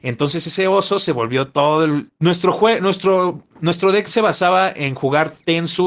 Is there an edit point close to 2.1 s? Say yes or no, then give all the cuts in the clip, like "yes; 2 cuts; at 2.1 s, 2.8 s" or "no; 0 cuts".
yes; 1 cut; at 2.1 s